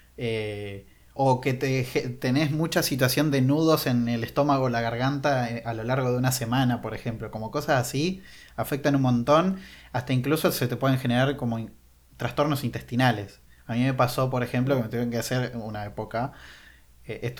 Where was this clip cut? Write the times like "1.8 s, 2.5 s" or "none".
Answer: 1.2 s